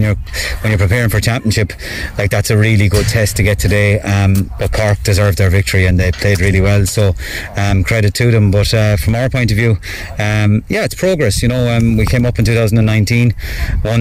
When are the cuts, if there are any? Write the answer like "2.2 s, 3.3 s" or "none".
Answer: 4.6 s